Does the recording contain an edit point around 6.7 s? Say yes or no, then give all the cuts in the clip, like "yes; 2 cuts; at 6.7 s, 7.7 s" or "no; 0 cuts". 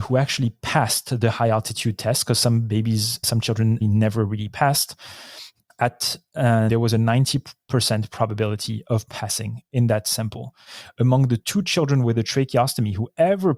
yes; 2 cuts; at 3.8 s, 6.7 s